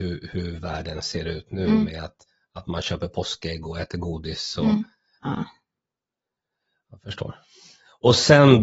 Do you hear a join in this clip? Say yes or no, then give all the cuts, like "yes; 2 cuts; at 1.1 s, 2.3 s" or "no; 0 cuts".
yes; 1 cut; at 5.2 s